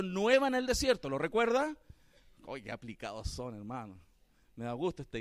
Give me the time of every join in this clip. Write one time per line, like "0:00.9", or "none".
none